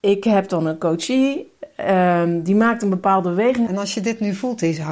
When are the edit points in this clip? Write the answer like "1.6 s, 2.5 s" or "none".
3.7 s